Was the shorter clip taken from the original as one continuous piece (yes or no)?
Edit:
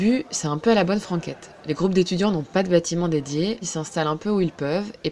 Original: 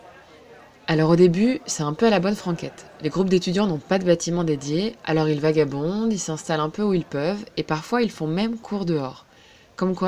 no